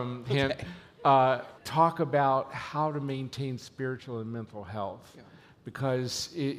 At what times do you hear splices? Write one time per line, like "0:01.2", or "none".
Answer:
0:01.6